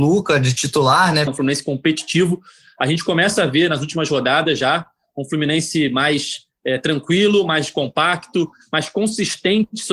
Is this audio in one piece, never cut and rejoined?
no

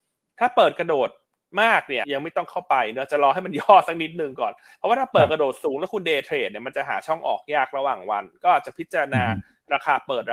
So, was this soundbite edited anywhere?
yes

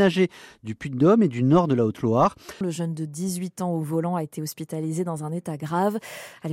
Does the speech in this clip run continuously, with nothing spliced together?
no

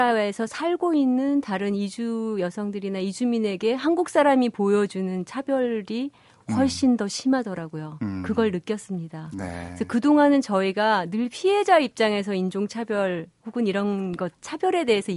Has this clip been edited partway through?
no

